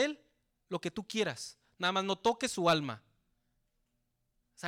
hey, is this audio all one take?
yes; 0 cuts

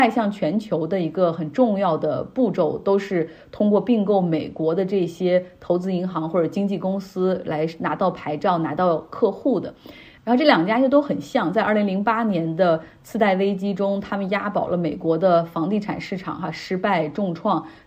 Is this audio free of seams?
yes; 0 cuts

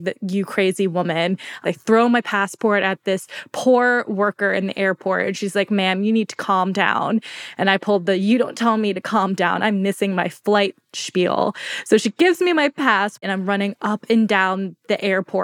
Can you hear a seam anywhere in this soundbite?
no; 0 cuts

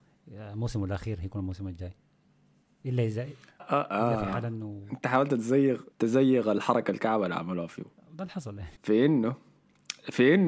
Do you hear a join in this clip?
yes; 3 cuts; at 3.6 s, 5.9 s, 8.8 s

